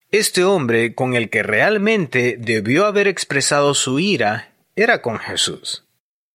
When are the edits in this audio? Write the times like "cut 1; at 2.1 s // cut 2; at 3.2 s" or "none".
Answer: none